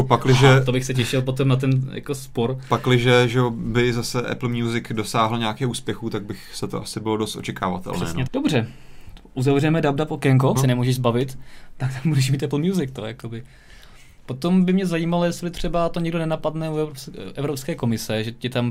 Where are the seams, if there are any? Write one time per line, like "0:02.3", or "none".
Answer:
0:08.3
0:10.5

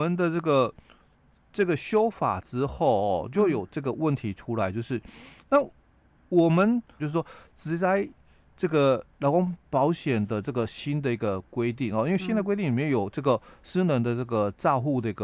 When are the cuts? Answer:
0:07.0

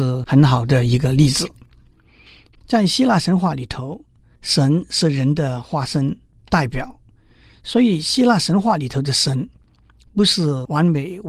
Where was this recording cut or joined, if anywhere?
0:02.5

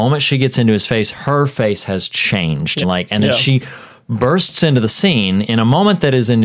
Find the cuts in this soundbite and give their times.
0:02.8
0:05.4

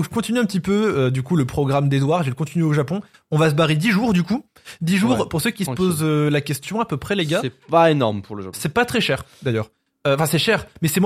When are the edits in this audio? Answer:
none

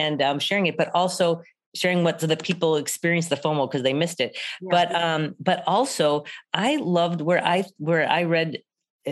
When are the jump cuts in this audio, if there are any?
0:06.5

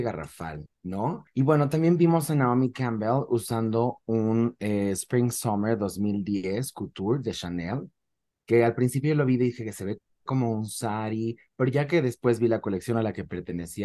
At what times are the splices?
none

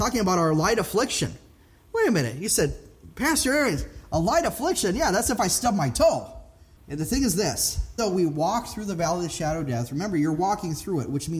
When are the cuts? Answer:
0:06.8
0:08.0

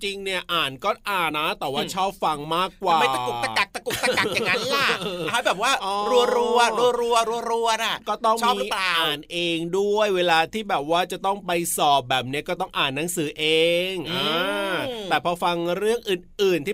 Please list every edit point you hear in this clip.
0:01.3

